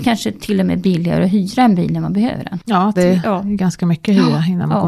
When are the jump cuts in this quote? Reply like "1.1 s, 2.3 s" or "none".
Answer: 2.9 s